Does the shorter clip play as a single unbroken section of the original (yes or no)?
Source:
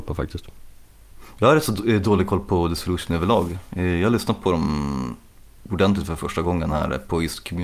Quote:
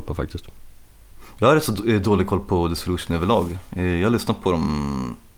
yes